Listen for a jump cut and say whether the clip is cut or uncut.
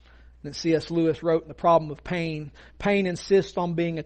uncut